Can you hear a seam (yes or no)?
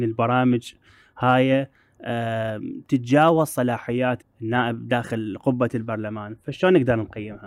yes